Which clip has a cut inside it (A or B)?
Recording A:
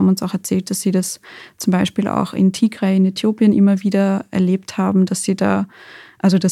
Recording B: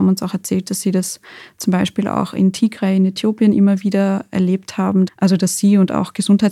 B